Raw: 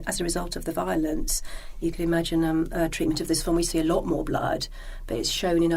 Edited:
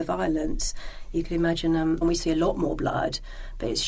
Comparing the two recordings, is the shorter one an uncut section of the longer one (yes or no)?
no